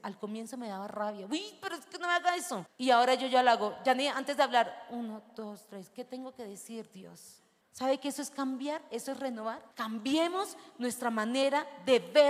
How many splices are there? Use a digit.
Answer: 0